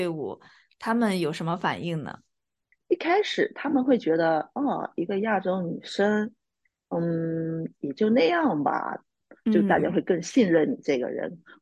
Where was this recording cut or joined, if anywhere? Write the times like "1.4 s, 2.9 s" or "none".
9.3 s